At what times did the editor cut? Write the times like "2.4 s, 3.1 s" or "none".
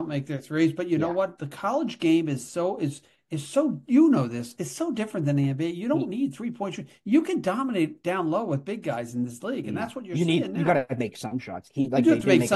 none

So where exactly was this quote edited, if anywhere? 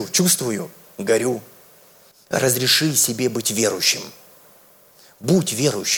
2.1 s

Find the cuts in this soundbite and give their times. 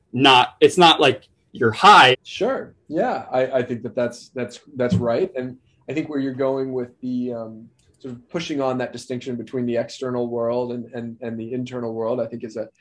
2.1 s

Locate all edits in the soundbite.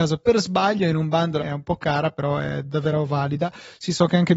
1.4 s

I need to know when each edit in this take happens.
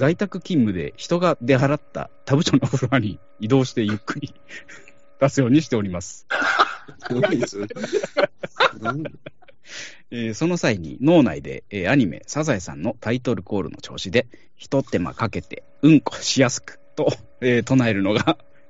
7.1 s

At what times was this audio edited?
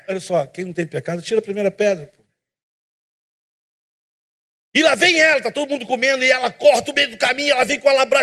none

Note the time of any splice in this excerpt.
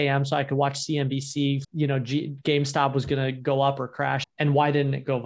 1.6 s, 4.2 s

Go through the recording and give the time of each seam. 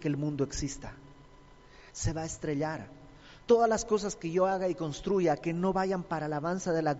1.9 s

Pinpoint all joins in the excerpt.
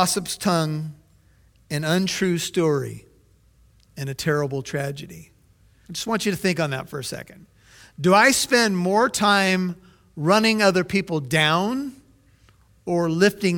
5.9 s

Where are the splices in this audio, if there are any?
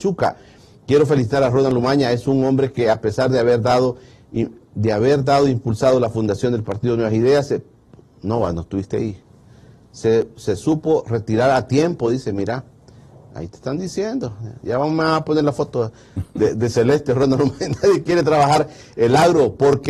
none

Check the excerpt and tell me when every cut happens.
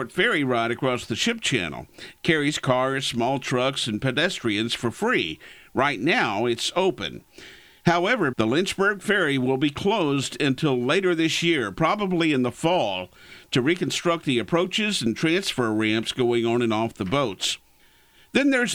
8.3 s

